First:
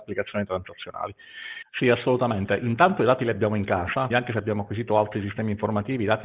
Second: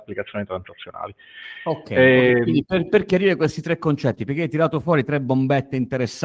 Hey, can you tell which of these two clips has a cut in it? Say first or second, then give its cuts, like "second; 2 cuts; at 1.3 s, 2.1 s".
first; 2 cuts; at 1.6 s, 4.1 s